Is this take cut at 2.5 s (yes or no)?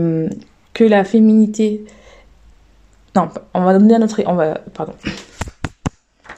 no